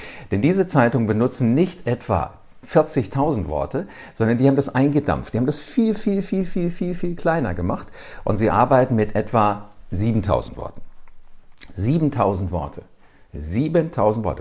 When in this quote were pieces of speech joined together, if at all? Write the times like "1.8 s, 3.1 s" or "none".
none